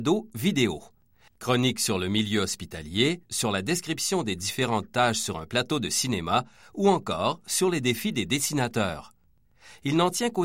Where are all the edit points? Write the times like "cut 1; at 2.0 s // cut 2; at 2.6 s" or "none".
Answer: cut 1; at 1.3 s // cut 2; at 3.3 s